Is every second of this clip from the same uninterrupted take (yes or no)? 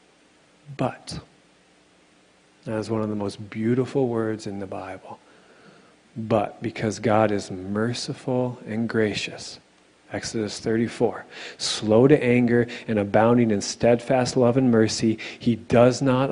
yes